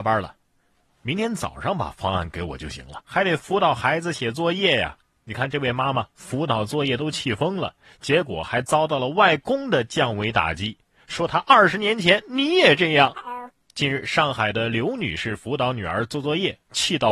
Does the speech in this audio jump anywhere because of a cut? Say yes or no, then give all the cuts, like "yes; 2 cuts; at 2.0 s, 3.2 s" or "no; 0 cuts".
yes; 1 cut; at 3.0 s